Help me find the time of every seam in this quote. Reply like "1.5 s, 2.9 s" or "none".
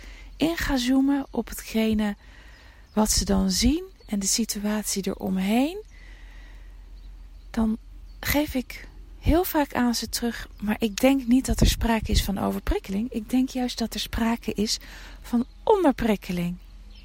none